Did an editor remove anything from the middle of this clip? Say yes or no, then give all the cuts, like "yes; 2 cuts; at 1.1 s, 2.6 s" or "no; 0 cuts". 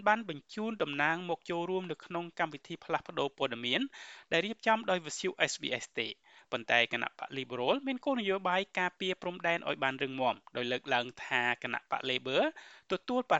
no; 0 cuts